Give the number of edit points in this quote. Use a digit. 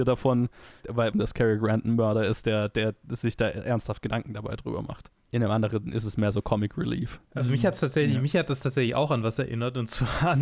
1